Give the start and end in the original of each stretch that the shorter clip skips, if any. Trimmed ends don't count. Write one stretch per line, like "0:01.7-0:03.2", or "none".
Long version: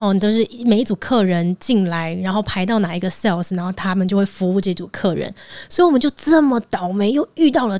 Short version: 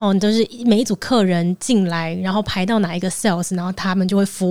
none